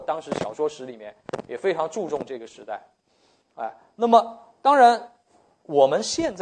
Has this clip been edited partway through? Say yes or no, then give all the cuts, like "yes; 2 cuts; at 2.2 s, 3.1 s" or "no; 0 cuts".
no; 0 cuts